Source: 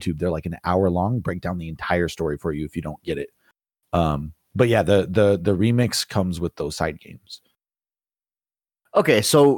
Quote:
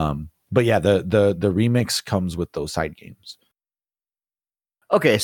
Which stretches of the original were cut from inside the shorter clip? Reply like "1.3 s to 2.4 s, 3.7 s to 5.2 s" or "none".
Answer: none